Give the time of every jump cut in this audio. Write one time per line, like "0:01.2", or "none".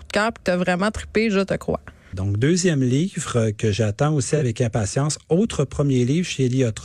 0:02.1